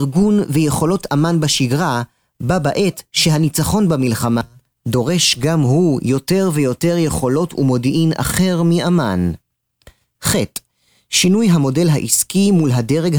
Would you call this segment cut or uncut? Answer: uncut